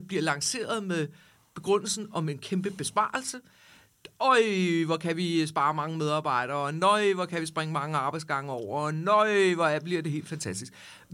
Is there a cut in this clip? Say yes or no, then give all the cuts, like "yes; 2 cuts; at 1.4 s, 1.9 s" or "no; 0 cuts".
no; 0 cuts